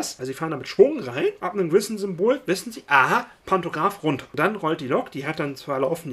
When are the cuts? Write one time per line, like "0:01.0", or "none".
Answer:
0:03.4